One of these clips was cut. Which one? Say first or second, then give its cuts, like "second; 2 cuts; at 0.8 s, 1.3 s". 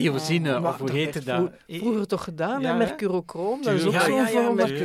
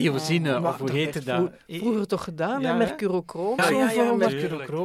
second; 1 cut; at 3.6 s